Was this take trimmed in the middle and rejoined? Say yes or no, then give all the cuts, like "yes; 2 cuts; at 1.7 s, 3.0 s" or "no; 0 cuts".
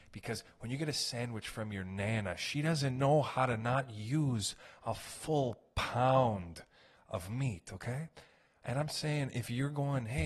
no; 0 cuts